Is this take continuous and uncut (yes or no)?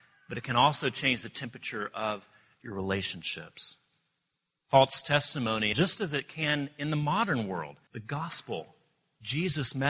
no